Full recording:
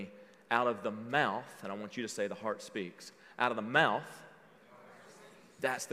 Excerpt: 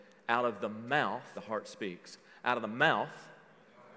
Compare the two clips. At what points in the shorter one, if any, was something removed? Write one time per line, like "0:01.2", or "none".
0:01.3